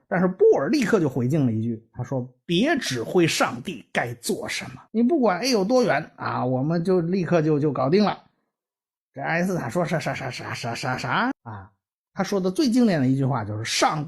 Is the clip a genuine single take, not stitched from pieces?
no; 2 cuts; at 4.9 s, 11.3 s

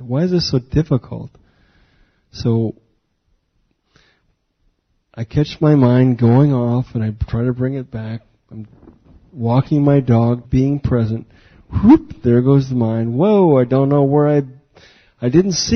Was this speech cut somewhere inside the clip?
yes; 1 cut; at 10.4 s

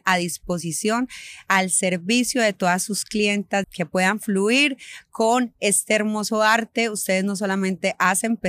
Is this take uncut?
no; 1 cut; at 3.6 s

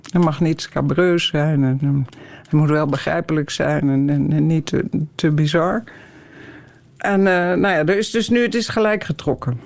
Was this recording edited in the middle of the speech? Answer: no; 0 cuts

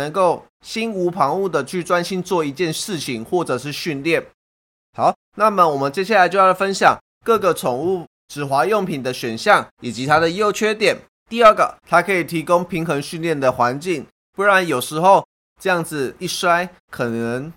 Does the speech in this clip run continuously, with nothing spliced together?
no; 3 cuts; at 4.7 s, 11.2 s, 14.2 s

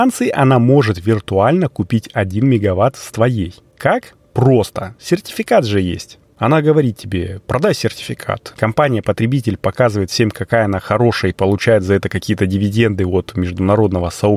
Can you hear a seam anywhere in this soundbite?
yes; 1 cut; at 8.5 s

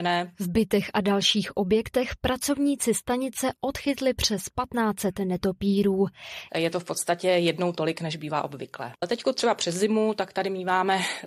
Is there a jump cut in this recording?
yes; 2 cuts; at 6.5 s, 8.9 s

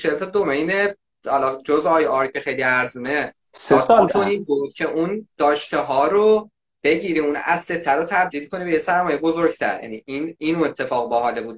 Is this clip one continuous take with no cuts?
no; 1 cut; at 4.1 s

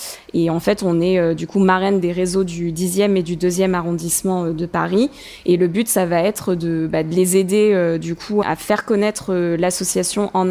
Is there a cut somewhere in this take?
no; 0 cuts

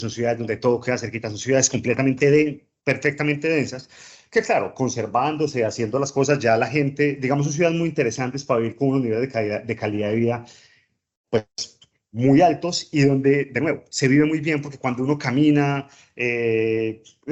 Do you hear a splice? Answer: no; 0 cuts

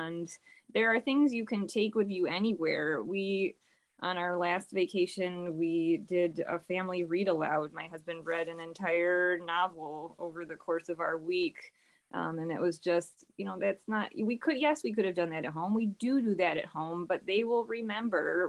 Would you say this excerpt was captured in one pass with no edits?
yes; 0 cuts

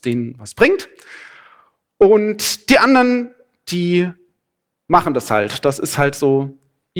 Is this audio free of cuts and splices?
yes; 0 cuts

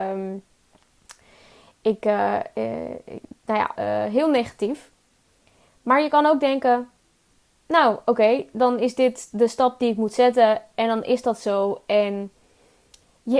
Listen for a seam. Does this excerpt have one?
yes; 1 cut; at 3.8 s

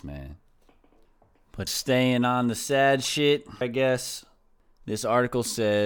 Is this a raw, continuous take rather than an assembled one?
no; 2 cuts; at 1.7 s, 3.6 s

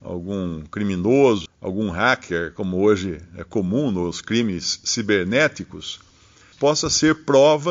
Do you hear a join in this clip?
yes; 2 cuts; at 1.5 s, 6.5 s

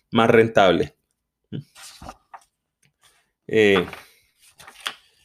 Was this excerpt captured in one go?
yes; 0 cuts

